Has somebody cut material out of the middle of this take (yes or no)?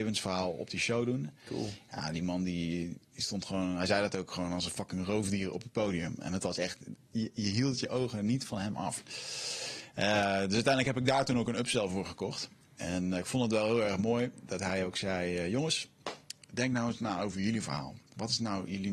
no